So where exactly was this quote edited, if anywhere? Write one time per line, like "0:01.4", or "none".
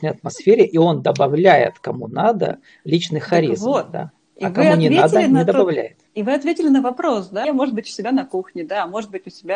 0:06.1
0:07.4